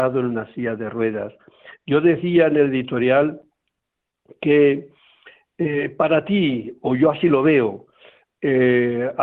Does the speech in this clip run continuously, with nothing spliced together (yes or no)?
yes